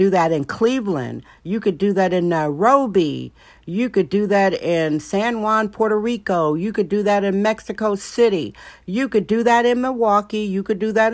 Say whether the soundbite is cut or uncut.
uncut